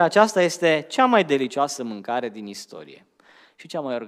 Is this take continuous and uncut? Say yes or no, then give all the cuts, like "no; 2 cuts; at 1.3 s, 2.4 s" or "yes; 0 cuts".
yes; 0 cuts